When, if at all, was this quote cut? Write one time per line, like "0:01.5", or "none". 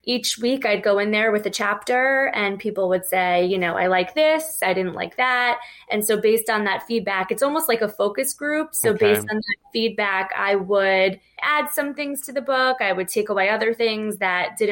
none